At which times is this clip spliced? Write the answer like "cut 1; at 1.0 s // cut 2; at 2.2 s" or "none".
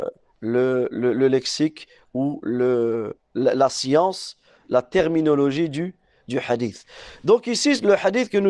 none